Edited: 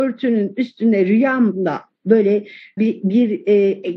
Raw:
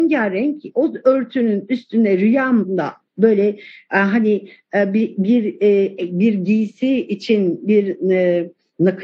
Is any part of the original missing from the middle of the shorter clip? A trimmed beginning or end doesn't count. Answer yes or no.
yes